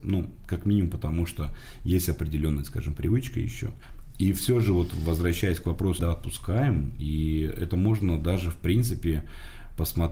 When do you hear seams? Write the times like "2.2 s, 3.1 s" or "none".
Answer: 6.0 s